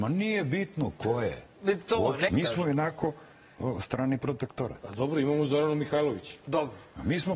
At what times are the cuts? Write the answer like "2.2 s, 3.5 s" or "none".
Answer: 2.3 s